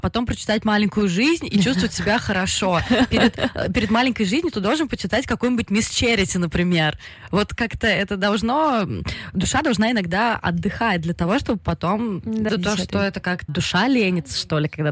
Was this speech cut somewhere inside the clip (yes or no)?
yes